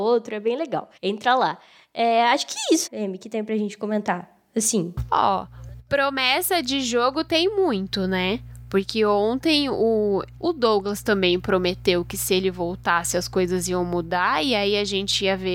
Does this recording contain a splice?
yes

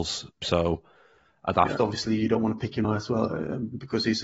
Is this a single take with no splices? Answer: no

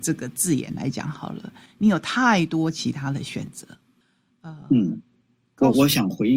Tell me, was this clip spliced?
no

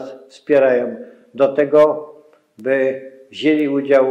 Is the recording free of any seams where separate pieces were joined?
yes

